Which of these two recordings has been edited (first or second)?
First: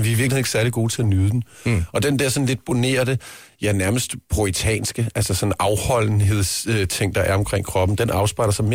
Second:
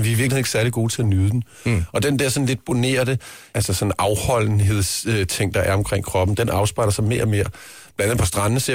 second